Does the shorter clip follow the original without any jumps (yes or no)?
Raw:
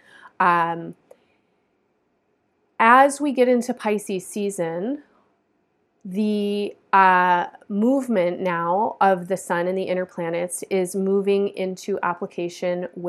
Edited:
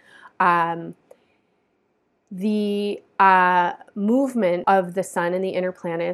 no